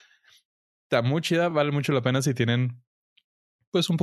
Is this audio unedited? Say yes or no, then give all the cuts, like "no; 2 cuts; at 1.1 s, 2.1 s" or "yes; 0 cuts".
yes; 0 cuts